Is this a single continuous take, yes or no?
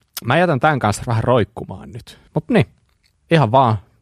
no